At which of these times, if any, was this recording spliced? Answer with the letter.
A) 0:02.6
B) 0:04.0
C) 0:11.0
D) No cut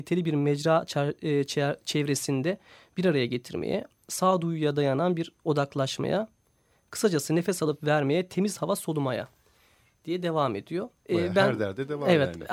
C